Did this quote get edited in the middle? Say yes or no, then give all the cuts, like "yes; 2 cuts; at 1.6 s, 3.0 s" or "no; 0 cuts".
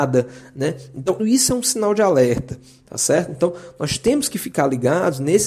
yes; 1 cut; at 1.2 s